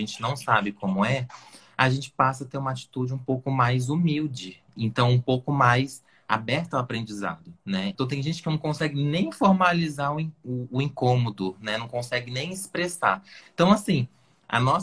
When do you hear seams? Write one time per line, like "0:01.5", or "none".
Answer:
0:07.9
0:13.4